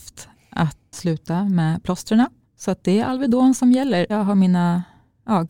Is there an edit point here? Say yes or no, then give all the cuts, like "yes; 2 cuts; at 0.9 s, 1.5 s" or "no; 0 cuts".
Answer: yes; 2 cuts; at 0.9 s, 4.1 s